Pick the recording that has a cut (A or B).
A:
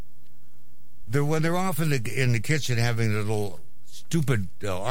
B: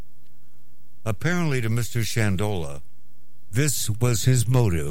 A